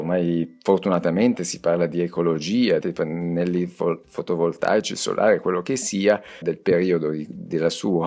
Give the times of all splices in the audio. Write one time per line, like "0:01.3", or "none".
0:02.8
0:06.4